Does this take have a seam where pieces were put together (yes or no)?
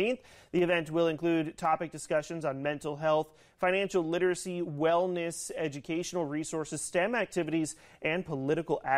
no